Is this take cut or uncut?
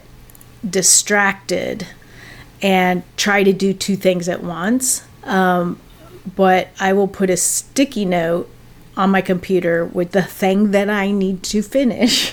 cut